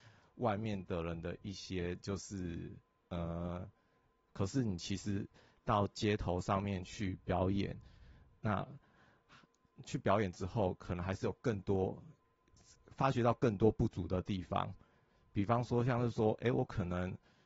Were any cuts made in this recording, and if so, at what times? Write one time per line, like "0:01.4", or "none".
0:04.3